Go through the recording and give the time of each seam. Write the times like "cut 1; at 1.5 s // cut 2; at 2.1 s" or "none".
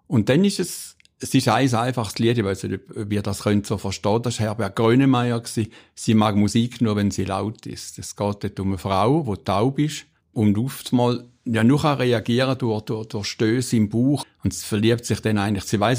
cut 1; at 10.3 s // cut 2; at 14.2 s